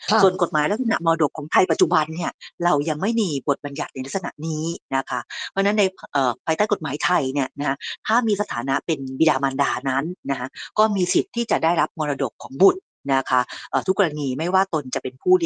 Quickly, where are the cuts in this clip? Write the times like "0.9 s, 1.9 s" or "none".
none